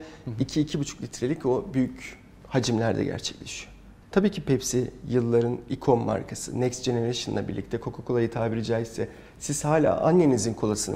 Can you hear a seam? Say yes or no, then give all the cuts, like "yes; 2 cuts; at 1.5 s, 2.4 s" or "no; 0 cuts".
yes; 1 cut; at 4.0 s